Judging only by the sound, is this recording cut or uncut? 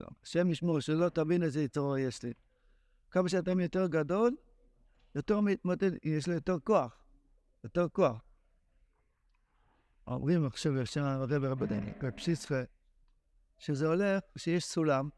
uncut